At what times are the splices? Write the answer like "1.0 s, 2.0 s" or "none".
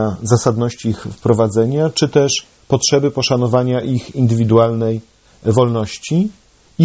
none